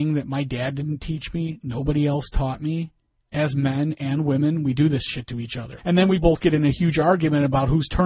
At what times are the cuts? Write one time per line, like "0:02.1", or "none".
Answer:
0:05.8